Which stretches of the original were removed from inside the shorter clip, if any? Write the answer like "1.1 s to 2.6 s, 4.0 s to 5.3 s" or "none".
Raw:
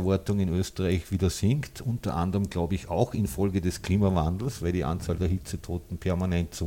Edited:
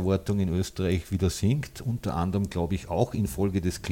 none